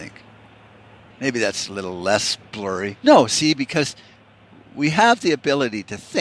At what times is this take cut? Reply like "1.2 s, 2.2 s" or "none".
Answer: 1.1 s, 3.0 s